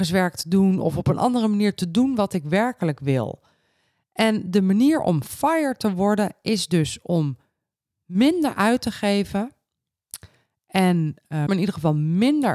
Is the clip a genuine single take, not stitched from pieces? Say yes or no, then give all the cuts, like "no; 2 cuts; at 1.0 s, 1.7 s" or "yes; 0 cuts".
no; 1 cut; at 11.5 s